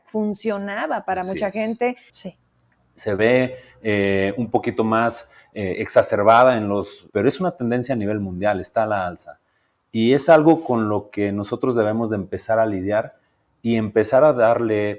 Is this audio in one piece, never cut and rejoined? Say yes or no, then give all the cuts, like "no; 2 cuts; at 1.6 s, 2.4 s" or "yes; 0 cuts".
no; 2 cuts; at 2.1 s, 7.1 s